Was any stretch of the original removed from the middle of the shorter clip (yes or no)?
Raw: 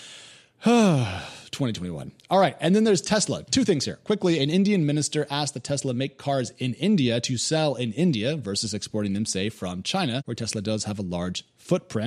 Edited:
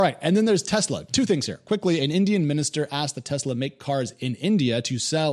no